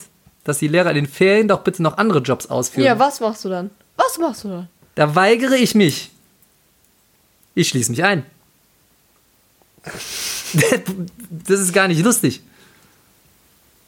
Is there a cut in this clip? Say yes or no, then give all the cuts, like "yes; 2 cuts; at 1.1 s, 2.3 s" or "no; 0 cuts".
no; 0 cuts